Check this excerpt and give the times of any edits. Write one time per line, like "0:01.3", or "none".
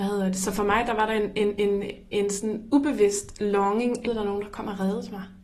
0:01.6
0:04.0